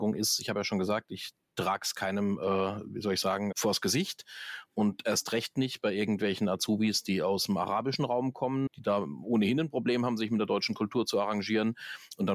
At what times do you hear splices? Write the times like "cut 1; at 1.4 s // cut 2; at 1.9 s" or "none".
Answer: cut 1; at 3.5 s // cut 2; at 8.7 s

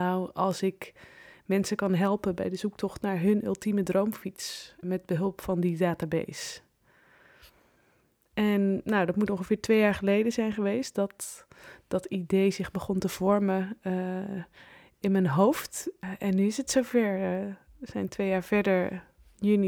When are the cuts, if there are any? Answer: cut 1; at 4.8 s

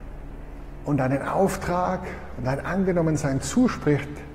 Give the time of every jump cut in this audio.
none

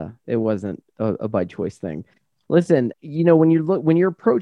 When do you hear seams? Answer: cut 1; at 2.9 s

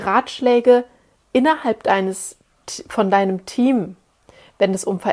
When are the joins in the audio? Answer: none

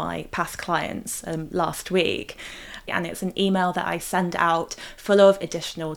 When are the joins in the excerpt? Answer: cut 1; at 2.9 s

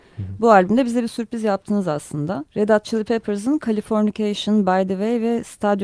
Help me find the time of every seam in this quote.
cut 1; at 2.5 s

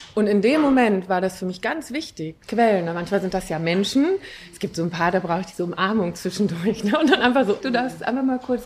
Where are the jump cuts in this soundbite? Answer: cut 1; at 2.4 s // cut 2; at 7.6 s

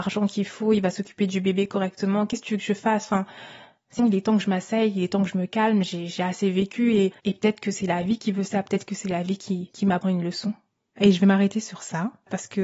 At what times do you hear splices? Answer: cut 1; at 4.0 s

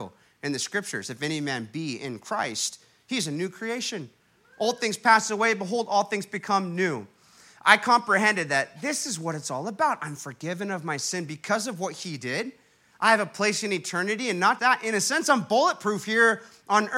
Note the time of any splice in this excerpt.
cut 1; at 14.6 s

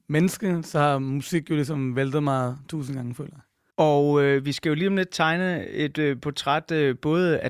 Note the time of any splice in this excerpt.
none

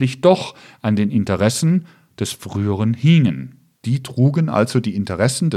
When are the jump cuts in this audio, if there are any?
cut 1; at 3.7 s

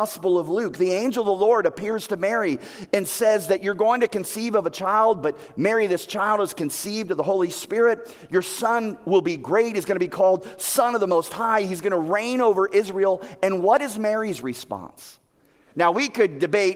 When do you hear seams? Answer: cut 1; at 15.7 s

